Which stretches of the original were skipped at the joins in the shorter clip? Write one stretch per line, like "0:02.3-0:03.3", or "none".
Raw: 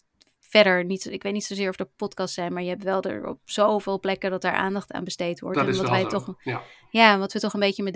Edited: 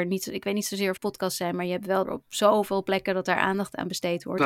0:01.8-0:01.9
0:03.0-0:03.2

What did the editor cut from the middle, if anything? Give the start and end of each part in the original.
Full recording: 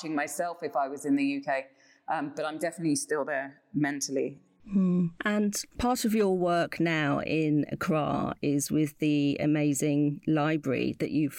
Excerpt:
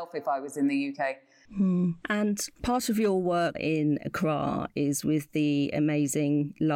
0:01.9-0:04.6
0:06.7-0:07.2

